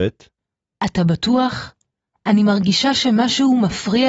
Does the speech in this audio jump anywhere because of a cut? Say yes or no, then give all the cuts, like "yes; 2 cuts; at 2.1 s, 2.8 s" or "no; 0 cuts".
no; 0 cuts